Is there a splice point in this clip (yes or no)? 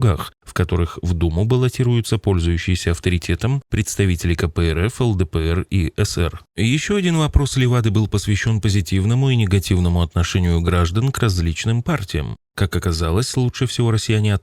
no